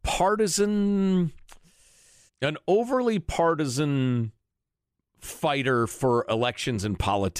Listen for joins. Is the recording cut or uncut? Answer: cut